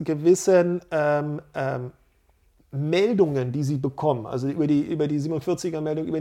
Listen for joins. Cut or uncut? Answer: uncut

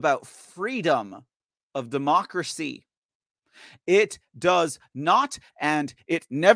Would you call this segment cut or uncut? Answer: uncut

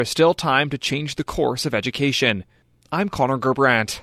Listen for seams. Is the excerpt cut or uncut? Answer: uncut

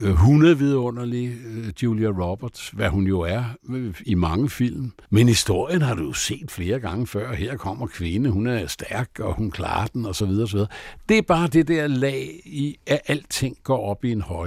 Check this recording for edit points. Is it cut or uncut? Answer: uncut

